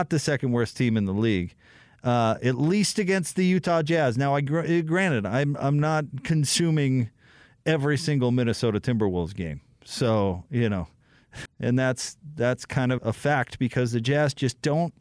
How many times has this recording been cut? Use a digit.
2